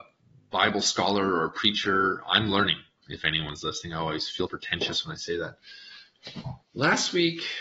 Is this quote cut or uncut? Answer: cut